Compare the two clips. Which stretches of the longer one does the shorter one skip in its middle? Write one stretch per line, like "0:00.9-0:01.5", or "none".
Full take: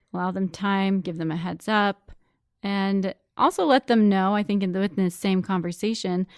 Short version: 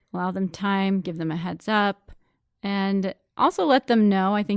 none